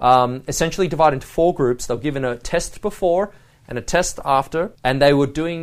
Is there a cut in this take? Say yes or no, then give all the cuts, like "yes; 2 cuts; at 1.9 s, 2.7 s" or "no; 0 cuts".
yes; 1 cut; at 4.7 s